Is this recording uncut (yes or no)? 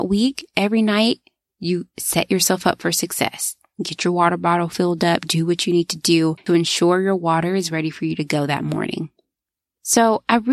yes